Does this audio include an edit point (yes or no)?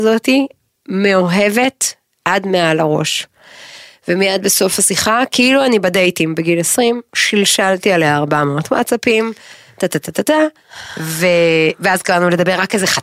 no